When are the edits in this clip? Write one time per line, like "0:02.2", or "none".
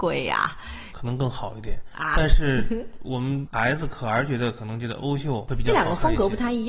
0:00.9